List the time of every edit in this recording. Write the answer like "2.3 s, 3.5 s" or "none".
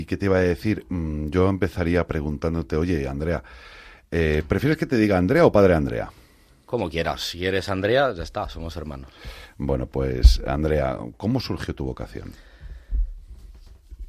none